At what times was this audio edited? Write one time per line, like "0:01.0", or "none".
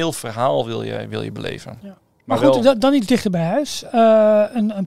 none